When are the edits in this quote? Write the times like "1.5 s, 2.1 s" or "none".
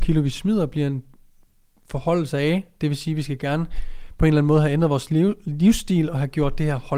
none